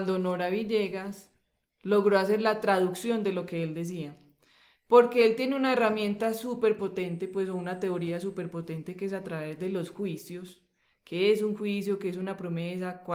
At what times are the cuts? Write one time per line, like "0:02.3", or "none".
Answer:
none